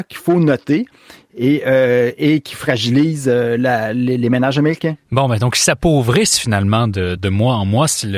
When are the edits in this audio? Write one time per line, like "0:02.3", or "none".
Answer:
0:07.2